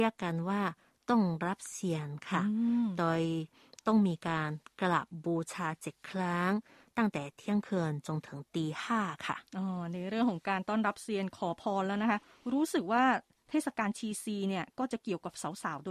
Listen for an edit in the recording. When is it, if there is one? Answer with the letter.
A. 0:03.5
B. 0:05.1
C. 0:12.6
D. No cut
D